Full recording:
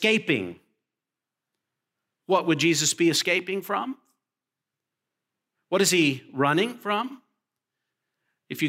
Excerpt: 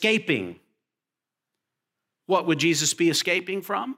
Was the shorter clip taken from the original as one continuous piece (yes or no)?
yes